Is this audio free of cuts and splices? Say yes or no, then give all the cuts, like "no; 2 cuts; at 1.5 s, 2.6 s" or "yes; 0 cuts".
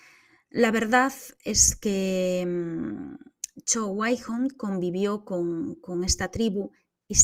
yes; 0 cuts